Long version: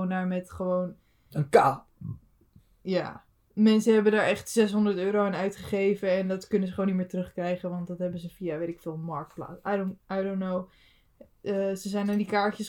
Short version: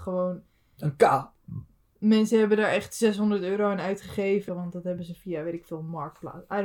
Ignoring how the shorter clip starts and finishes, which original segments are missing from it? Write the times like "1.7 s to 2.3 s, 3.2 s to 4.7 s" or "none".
2.3 s to 3.4 s, 6.0 s to 7.6 s